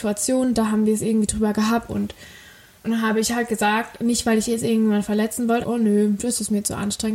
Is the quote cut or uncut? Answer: cut